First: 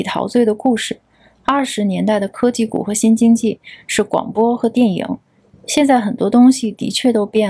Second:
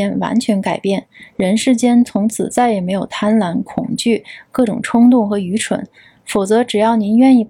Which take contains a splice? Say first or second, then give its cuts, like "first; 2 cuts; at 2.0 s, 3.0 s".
first; 1 cut; at 5.5 s